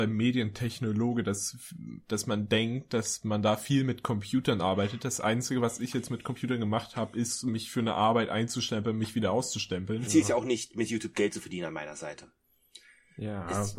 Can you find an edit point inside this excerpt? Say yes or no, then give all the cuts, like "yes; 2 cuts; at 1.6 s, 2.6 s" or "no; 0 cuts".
yes; 1 cut; at 10.1 s